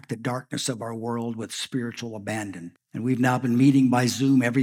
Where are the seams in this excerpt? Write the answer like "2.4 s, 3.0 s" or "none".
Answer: 2.7 s